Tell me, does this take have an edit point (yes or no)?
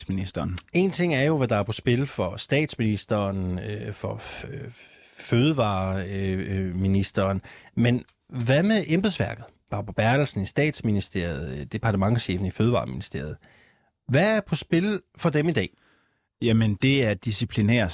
yes